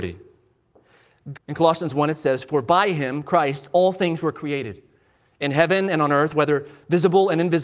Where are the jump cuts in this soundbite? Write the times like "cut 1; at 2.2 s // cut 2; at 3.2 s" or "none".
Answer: cut 1; at 1.3 s